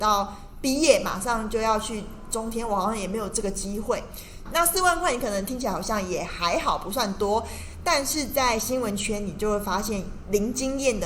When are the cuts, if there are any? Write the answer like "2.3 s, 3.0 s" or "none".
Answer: 4.5 s